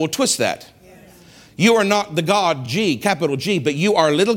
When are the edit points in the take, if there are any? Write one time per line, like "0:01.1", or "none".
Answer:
none